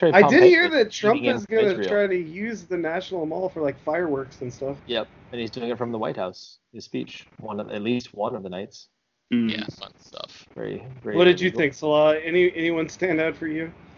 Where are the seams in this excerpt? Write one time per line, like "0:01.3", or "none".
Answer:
none